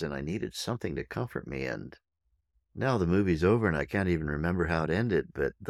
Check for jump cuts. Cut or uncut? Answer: uncut